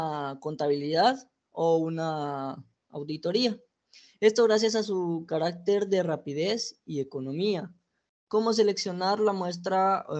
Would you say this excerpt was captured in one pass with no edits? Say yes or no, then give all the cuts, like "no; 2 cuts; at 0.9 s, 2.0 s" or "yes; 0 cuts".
yes; 0 cuts